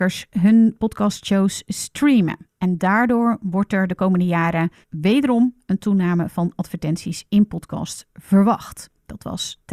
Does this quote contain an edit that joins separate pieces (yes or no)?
yes